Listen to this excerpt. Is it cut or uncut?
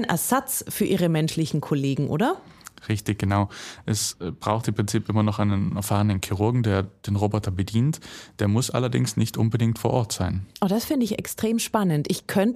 uncut